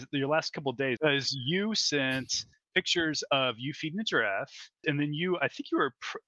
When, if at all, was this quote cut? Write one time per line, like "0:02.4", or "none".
0:01.0
0:04.8